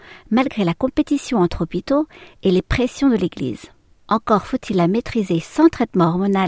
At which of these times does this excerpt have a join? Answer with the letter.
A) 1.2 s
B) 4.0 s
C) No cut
B